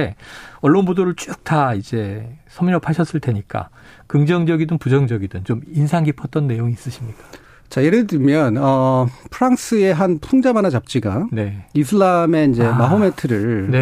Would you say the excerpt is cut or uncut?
uncut